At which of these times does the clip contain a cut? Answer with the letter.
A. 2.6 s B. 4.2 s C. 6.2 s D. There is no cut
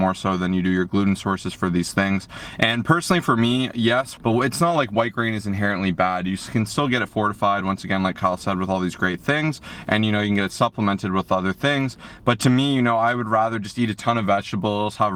B